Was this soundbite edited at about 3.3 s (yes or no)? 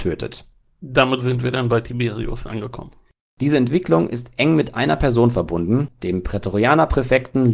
yes